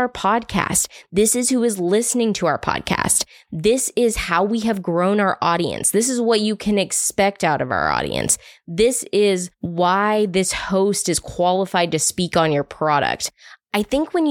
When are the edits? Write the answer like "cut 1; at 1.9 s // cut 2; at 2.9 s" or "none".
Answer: none